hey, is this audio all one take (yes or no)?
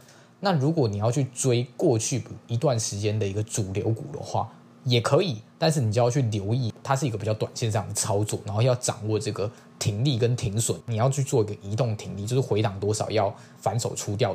no